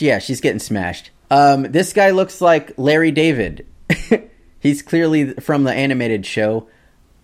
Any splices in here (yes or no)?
yes